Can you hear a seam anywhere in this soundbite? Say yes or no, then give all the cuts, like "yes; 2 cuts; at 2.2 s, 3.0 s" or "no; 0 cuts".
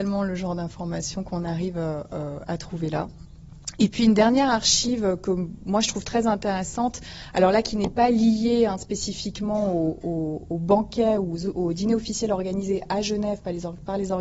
no; 0 cuts